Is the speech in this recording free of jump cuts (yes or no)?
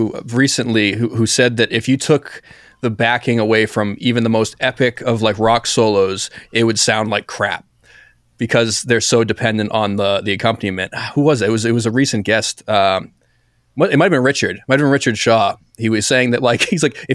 yes